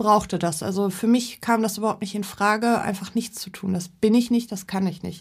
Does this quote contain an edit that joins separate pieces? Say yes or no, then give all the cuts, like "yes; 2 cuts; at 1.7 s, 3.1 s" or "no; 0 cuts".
no; 0 cuts